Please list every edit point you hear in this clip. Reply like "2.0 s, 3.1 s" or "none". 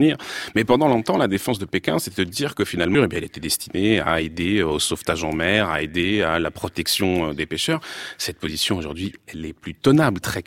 2.9 s